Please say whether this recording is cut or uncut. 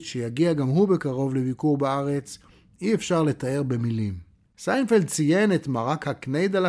cut